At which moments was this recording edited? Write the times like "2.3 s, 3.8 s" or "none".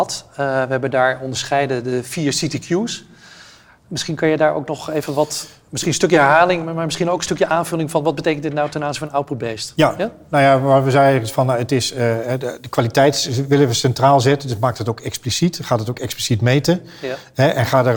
none